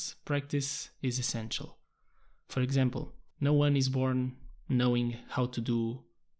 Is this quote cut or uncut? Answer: cut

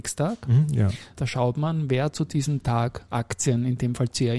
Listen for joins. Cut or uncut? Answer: cut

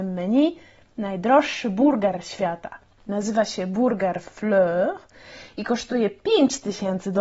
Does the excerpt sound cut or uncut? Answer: uncut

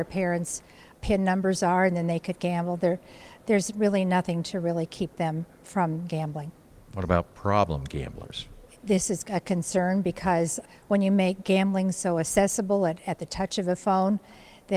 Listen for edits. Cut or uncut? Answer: uncut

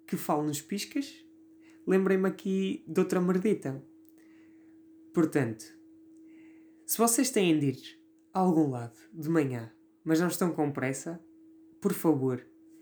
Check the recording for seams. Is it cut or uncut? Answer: uncut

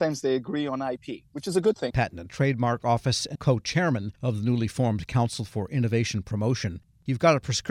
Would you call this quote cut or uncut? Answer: cut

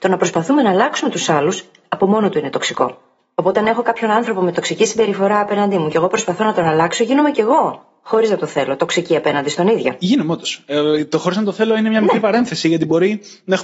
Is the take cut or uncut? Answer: uncut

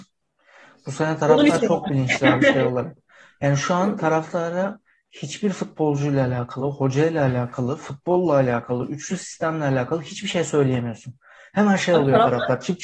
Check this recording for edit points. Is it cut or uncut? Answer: uncut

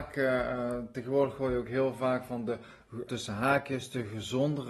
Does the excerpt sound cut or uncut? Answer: cut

